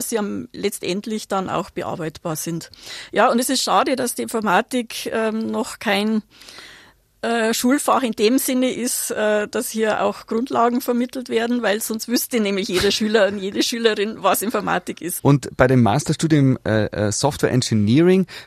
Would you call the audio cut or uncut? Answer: cut